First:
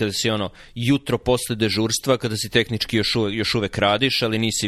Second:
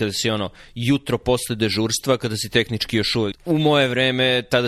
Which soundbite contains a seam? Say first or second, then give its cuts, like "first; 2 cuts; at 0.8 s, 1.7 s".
second; 1 cut; at 3.3 s